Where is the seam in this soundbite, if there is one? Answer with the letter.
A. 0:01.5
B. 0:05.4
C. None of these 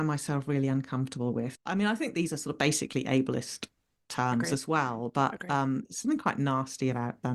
A